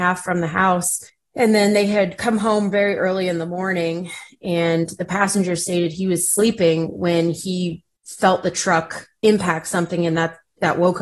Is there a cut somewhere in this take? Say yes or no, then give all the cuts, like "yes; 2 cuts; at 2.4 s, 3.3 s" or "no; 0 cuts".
no; 0 cuts